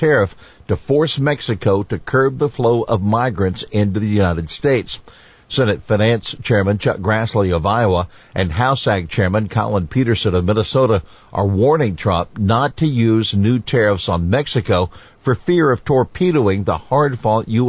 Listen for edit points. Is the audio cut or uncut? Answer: uncut